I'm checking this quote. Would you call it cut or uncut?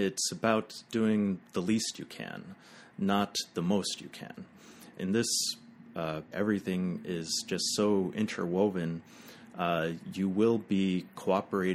cut